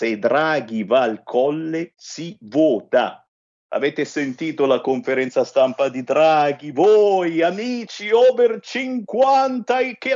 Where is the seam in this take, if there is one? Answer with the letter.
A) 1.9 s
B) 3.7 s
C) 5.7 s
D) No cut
B